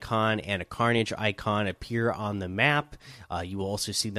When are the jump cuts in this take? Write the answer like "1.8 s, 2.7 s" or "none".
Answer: none

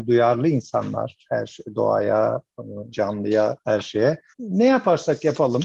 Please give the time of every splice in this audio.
2.9 s, 4.3 s

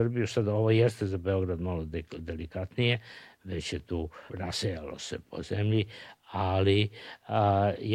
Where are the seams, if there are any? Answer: 4.3 s

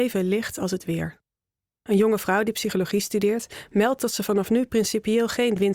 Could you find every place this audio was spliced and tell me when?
none

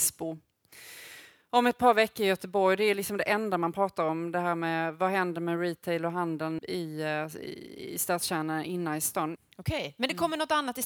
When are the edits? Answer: 6.6 s, 9.4 s

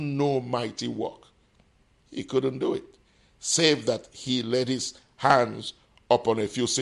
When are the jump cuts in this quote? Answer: none

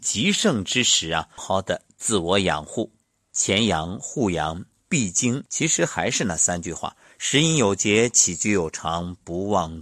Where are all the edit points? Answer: 1.4 s, 3.3 s, 5.5 s

